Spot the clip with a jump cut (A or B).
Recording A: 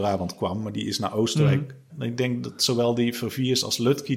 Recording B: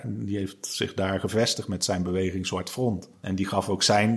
A